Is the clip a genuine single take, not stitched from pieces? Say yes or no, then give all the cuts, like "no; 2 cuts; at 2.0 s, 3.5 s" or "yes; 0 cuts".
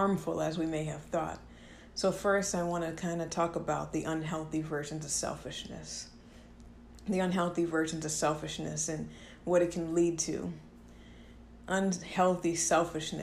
yes; 0 cuts